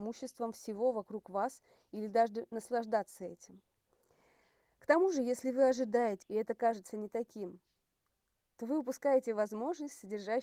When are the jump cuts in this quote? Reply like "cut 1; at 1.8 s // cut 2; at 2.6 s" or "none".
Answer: cut 1; at 6.2 s